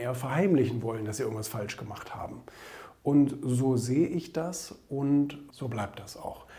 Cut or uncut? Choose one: cut